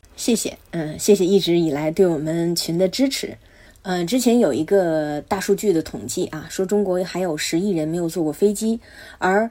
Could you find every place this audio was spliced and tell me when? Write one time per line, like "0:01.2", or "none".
none